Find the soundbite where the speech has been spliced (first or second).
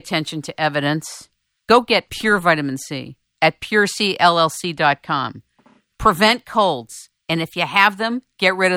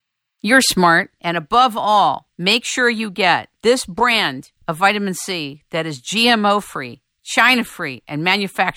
second